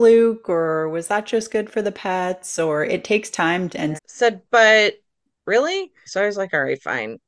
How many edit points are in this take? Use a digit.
2